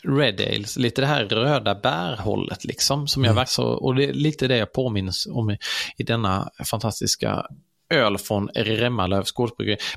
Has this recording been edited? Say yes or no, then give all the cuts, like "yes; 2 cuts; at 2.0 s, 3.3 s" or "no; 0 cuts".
yes; 1 cut; at 3.5 s